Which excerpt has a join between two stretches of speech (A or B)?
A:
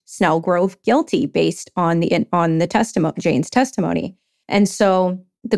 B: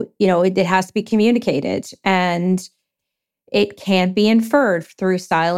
A